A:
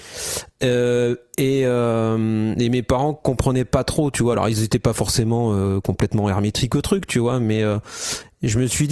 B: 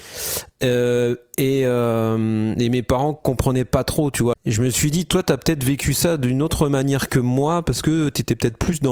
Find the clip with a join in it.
B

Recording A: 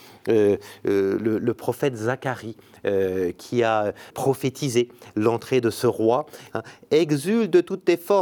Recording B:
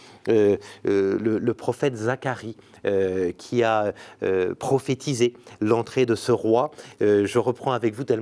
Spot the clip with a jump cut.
A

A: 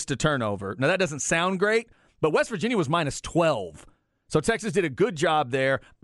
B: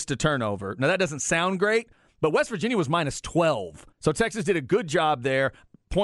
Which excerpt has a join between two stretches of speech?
B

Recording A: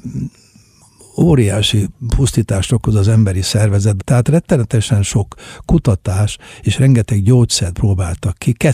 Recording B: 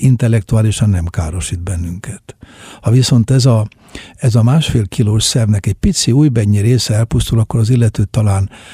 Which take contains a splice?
A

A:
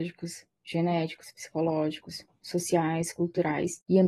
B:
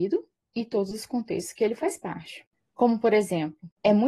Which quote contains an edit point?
B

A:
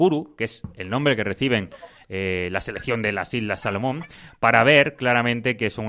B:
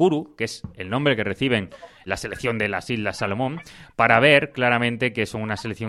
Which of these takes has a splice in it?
B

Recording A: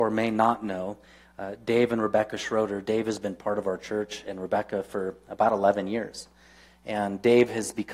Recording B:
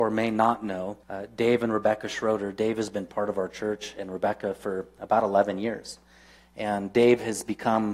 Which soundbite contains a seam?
B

